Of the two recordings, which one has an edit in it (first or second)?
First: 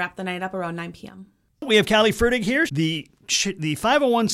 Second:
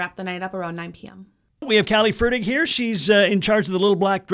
first